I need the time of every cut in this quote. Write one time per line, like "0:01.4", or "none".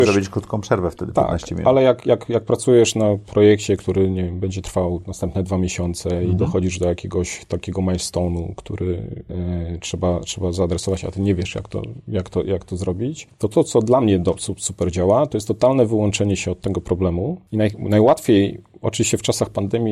none